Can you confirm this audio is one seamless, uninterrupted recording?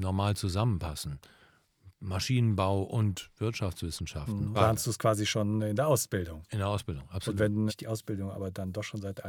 no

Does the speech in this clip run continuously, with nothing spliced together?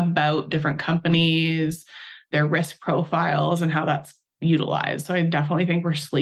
yes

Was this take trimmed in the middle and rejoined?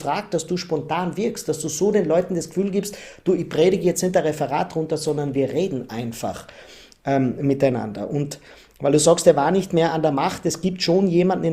no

